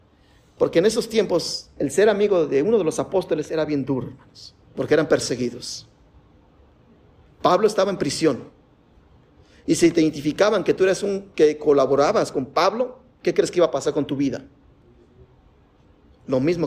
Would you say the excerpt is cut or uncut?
cut